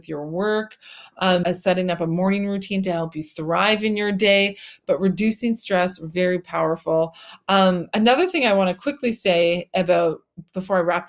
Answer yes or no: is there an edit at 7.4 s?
no